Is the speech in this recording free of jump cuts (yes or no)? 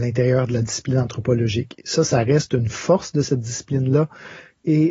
yes